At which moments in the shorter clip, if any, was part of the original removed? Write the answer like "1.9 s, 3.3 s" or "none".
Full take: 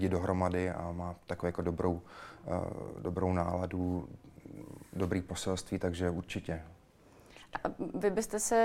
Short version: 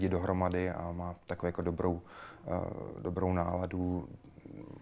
none